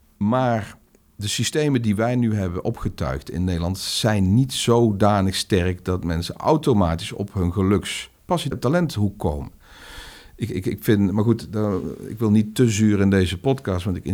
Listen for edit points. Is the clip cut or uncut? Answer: cut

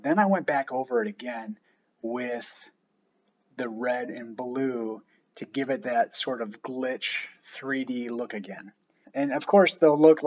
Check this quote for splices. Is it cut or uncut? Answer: cut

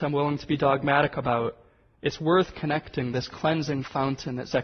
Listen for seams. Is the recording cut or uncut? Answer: uncut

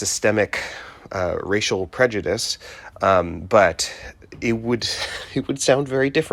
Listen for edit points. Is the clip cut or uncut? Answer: cut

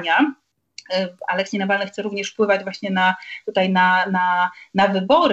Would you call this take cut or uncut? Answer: uncut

